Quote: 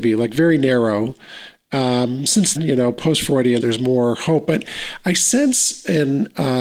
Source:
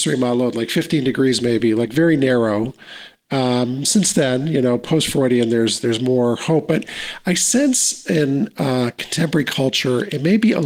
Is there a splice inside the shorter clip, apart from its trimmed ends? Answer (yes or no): yes